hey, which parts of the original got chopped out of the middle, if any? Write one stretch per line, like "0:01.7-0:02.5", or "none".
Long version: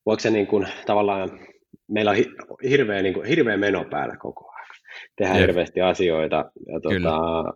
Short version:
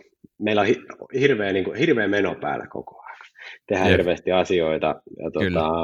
none